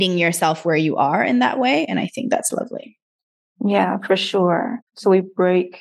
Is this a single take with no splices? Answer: yes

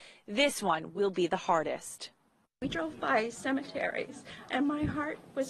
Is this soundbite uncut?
yes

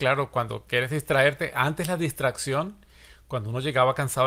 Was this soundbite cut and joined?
no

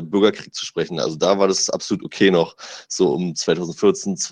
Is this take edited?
no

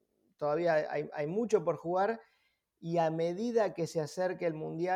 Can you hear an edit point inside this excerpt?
no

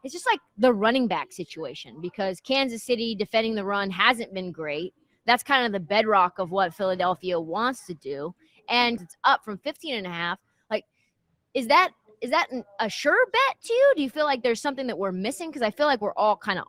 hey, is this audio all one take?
no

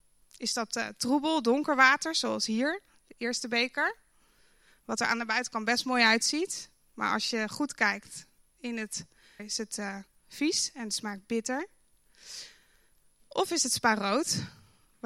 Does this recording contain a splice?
yes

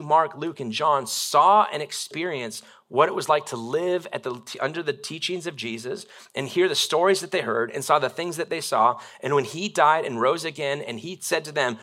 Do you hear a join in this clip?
no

